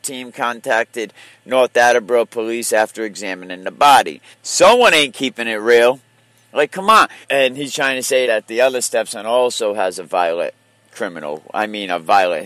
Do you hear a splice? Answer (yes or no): yes